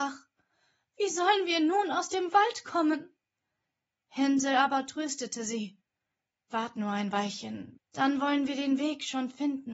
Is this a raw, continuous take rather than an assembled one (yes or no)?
no